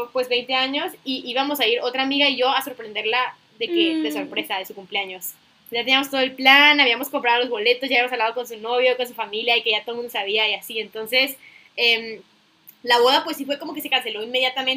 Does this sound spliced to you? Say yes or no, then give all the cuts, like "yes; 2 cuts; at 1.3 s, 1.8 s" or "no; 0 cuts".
no; 0 cuts